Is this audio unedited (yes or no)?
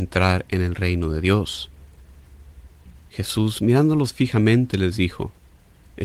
no